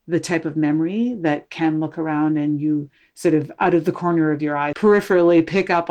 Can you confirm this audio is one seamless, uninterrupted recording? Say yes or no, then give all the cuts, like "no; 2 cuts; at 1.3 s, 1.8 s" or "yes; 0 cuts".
no; 1 cut; at 4.7 s